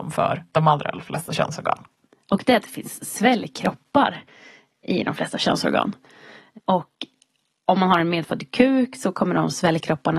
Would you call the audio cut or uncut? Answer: uncut